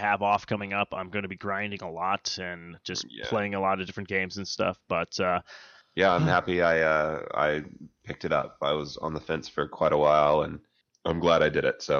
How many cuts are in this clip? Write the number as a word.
zero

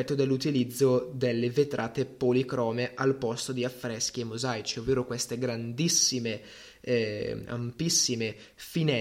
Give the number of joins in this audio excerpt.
zero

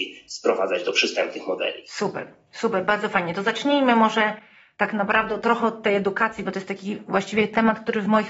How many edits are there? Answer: zero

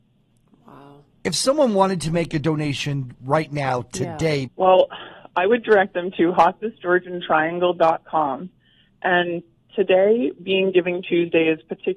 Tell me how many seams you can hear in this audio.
one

